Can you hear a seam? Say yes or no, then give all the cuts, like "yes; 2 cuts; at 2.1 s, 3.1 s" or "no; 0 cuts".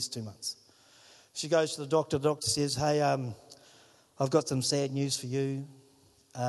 no; 0 cuts